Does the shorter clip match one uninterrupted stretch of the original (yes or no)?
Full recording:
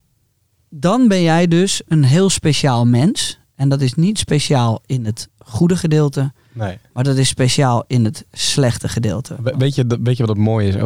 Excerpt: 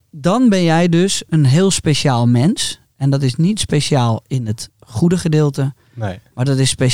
yes